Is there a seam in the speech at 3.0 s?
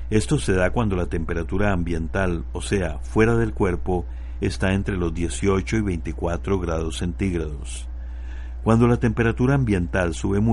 no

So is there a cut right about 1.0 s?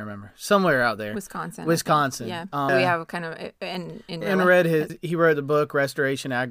no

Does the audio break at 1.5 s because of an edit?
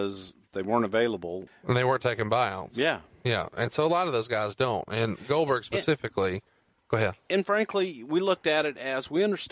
yes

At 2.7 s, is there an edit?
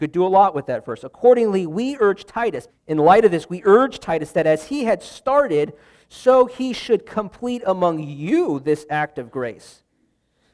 yes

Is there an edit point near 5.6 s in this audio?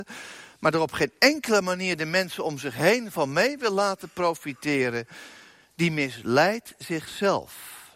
no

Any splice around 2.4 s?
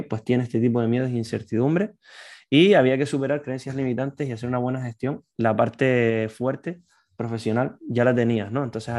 no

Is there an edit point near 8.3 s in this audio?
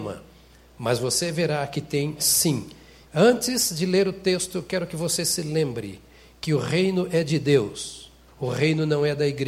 yes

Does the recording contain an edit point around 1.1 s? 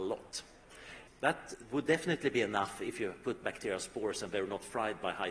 yes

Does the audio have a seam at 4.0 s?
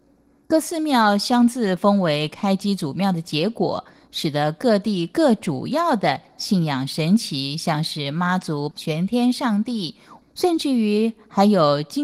no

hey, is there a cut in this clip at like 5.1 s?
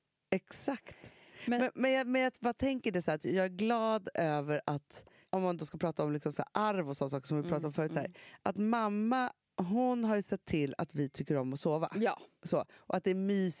no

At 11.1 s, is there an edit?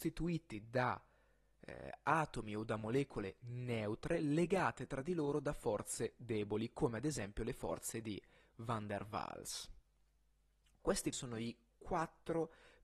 yes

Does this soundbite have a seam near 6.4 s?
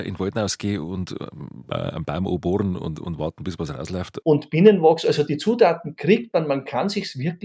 no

